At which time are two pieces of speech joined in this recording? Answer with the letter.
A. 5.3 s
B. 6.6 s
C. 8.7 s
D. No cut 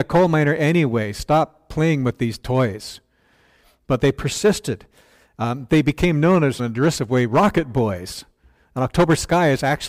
B